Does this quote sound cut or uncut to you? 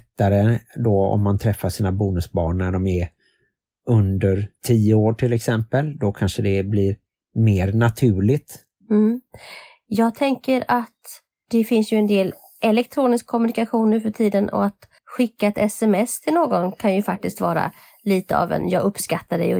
cut